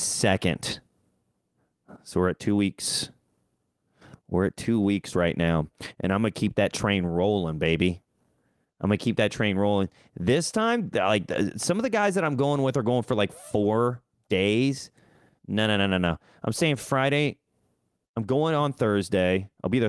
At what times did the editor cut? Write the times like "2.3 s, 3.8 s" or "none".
none